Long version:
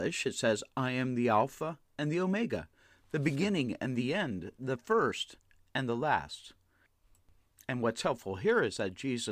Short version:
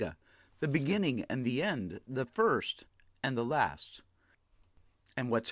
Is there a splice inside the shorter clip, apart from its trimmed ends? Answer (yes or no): no